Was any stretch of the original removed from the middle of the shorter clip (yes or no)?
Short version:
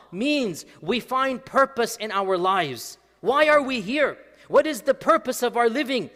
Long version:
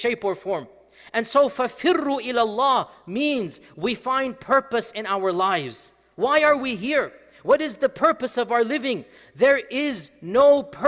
no